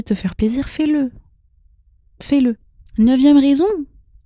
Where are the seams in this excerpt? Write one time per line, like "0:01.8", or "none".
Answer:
0:02.8